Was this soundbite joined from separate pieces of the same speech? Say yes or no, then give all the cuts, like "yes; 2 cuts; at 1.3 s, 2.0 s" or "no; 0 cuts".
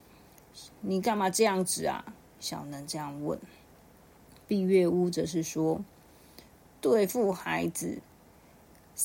no; 0 cuts